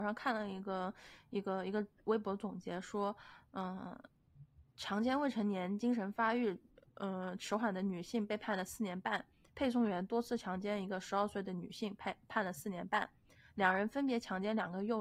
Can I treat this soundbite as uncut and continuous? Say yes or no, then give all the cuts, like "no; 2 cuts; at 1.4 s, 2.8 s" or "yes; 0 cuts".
yes; 0 cuts